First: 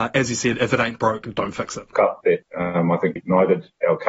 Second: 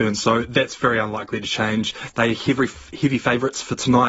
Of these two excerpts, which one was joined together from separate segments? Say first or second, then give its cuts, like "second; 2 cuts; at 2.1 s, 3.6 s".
first; 2 cuts; at 1.9 s, 3.2 s